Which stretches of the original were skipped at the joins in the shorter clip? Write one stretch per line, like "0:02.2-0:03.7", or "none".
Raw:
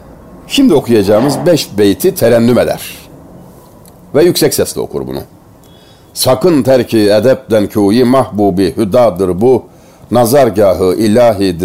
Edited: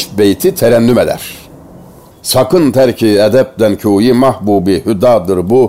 0:03.7-0:06.0